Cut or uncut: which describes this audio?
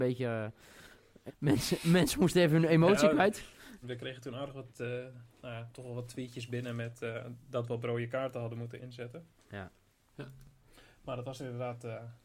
cut